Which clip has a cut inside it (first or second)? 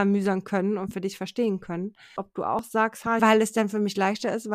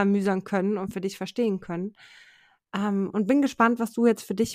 first